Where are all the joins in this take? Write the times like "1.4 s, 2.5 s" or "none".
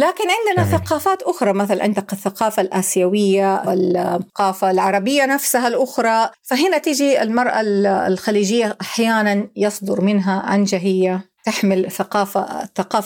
3.7 s, 11.4 s